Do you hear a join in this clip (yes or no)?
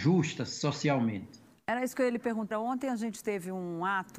yes